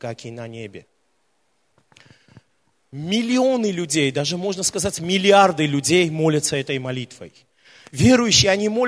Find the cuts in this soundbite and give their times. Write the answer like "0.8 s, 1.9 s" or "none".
none